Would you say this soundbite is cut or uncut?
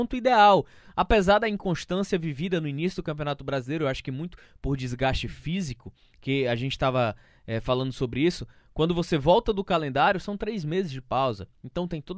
uncut